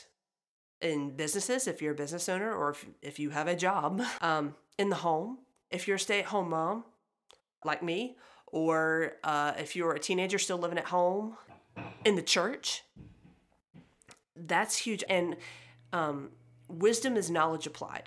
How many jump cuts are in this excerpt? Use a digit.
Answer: 3